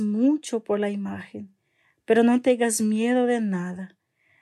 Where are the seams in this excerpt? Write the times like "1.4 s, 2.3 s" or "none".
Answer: none